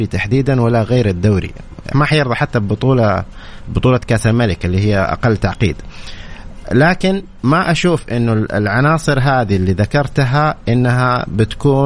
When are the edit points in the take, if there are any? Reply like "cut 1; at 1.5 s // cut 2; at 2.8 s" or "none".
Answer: cut 1; at 1.9 s